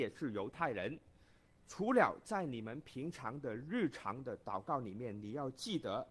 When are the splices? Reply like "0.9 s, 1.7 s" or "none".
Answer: 1.6 s